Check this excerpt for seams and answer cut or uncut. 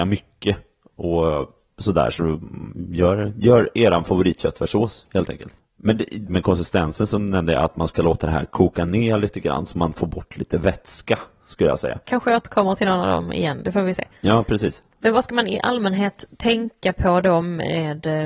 cut